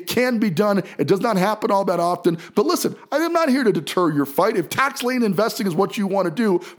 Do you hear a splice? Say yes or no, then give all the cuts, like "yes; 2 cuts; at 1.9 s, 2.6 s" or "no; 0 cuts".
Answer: no; 0 cuts